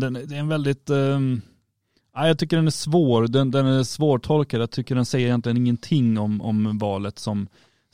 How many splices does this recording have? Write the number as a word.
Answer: zero